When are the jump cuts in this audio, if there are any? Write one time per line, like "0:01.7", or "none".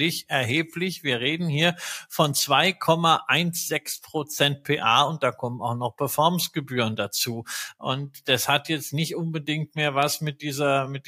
0:07.7